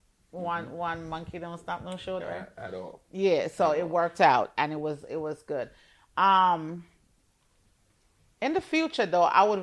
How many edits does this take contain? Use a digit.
1